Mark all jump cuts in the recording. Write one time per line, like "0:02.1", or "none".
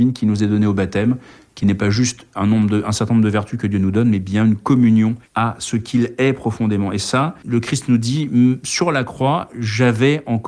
0:05.2